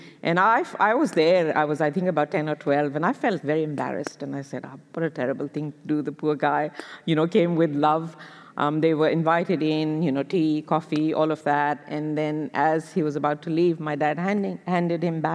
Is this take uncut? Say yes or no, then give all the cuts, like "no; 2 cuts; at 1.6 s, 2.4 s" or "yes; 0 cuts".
no; 2 cuts; at 3.4 s, 8.4 s